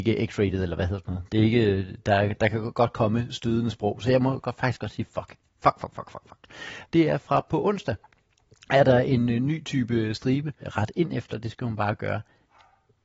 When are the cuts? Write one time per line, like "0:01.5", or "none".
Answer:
0:06.8
0:10.6